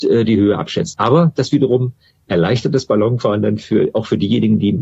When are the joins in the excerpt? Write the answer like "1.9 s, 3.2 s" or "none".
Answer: 0.9 s

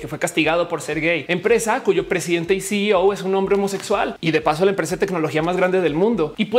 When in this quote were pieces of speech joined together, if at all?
1.3 s

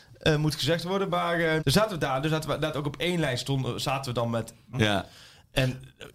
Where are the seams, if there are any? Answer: 1.6 s, 4.7 s

